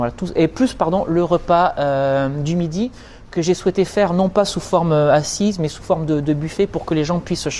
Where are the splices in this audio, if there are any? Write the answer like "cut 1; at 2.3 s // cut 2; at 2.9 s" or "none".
none